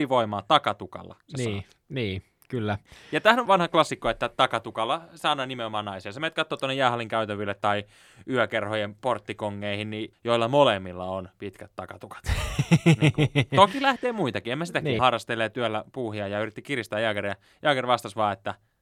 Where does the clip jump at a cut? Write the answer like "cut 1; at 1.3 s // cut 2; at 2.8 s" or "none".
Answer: cut 1; at 3.5 s // cut 2; at 10.1 s // cut 3; at 15.0 s

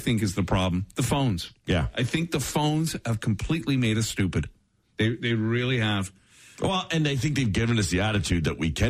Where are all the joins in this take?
none

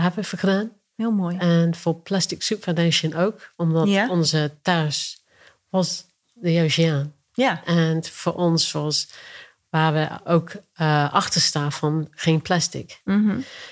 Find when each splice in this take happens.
none

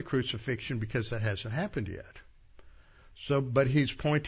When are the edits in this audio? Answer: none

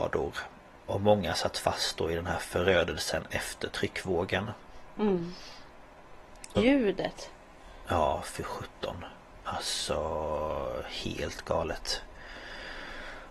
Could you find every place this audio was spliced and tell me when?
cut 1; at 6.6 s

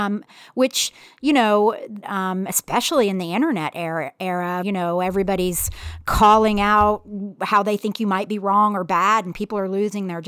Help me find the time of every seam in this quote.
cut 1; at 2.0 s // cut 2; at 4.6 s

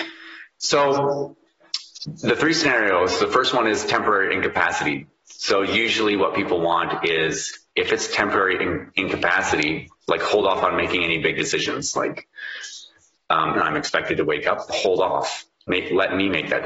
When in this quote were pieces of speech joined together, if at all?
cut 1; at 13.5 s // cut 2; at 14.7 s

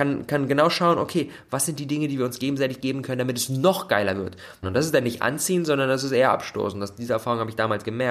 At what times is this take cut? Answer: cut 1; at 4.6 s

